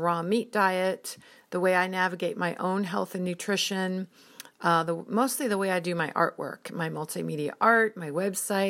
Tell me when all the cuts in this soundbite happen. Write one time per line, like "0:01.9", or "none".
none